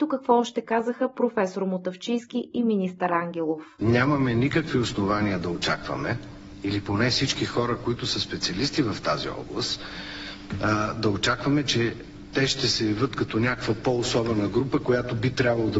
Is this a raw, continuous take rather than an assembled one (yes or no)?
yes